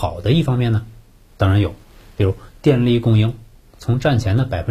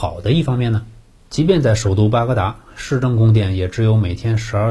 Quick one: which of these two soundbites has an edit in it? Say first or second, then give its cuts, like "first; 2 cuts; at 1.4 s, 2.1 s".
second; 1 cut; at 1.2 s